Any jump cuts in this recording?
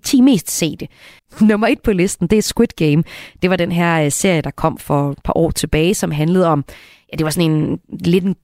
yes; 1 cut; at 1.2 s

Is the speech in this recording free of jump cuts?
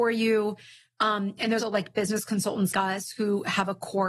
no; 2 cuts; at 1.6 s, 2.7 s

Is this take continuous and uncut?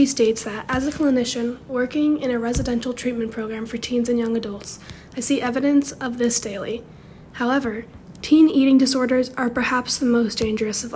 yes; 0 cuts

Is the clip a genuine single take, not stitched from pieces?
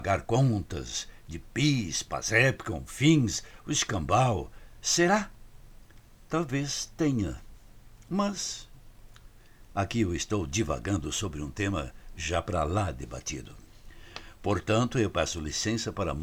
yes; 0 cuts

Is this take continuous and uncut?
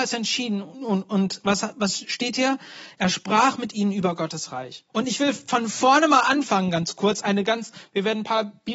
no; 1 cut; at 4.9 s

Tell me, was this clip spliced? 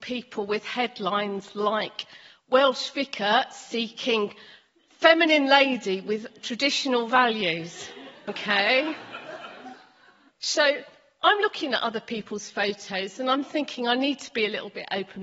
yes; 1 cut; at 10.3 s

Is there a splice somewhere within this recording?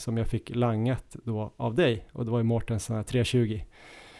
no; 0 cuts

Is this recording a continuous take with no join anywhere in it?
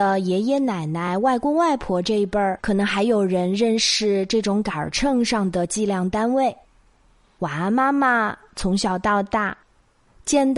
yes; 0 cuts

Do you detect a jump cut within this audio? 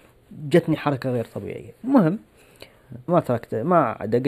yes; 1 cut; at 3.1 s

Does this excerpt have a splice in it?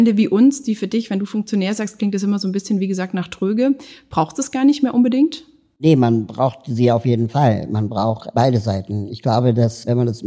no; 0 cuts

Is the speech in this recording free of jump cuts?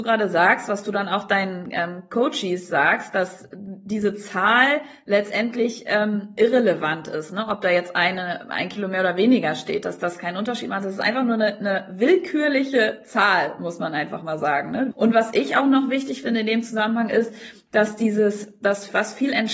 no; 1 cut; at 14.9 s

